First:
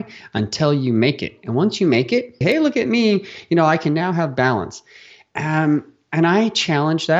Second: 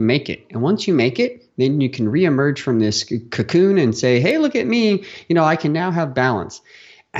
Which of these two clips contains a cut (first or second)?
first